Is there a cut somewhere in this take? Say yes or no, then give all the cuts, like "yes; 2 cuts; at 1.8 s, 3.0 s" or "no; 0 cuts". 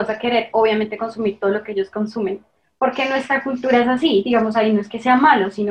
no; 0 cuts